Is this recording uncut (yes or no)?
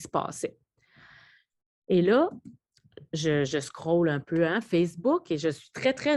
yes